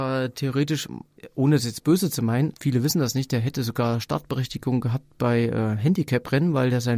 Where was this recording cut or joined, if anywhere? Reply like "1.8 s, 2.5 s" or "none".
2.5 s